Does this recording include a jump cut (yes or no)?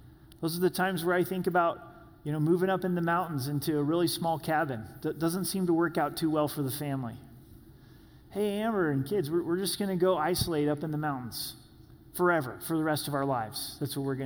no